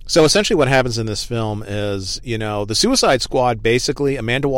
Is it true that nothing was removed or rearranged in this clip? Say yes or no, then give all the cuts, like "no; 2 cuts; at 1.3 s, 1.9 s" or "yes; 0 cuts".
yes; 0 cuts